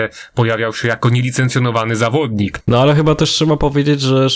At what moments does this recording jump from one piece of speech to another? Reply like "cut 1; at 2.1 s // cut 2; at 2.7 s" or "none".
cut 1; at 2.6 s